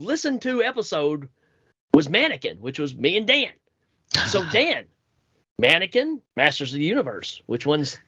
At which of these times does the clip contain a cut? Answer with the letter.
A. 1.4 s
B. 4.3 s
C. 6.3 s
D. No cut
C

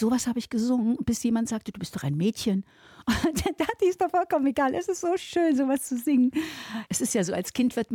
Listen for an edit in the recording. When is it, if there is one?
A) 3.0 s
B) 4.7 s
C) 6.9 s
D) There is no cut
C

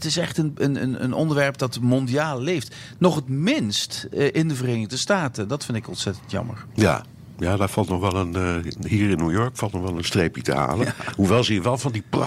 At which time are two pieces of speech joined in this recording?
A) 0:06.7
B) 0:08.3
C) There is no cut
C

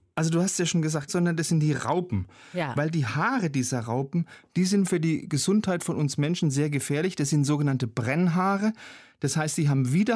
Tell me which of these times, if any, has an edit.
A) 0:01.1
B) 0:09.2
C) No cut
A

